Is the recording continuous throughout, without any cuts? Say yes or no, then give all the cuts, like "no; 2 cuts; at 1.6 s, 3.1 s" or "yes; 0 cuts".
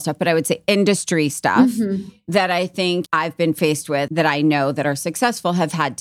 no; 2 cuts; at 3.1 s, 4.1 s